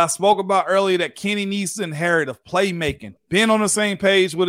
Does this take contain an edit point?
yes; 1 cut; at 3.2 s

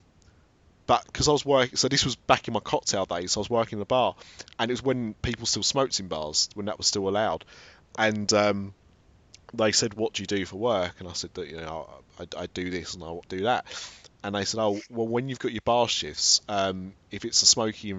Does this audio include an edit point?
yes; 1 cut; at 13.2 s

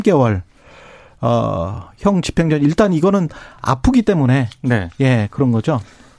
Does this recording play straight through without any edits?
yes; 0 cuts

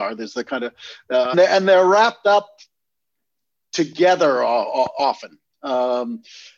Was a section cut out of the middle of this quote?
yes; 1 cut; at 1.3 s

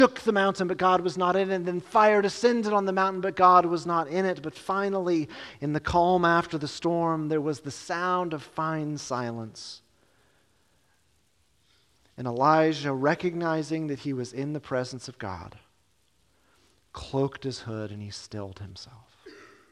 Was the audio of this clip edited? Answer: no; 0 cuts

